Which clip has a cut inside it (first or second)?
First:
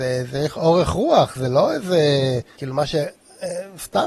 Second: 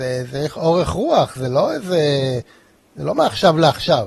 first